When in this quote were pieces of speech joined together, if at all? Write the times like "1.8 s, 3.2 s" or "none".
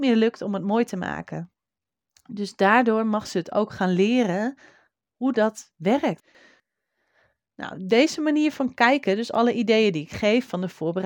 none